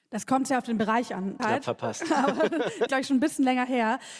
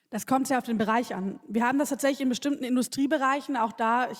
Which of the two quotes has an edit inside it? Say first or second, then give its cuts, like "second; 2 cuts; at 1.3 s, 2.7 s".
first; 2 cuts; at 1.4 s, 2.9 s